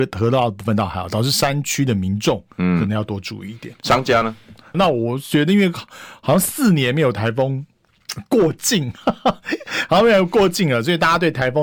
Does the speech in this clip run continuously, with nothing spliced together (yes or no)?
no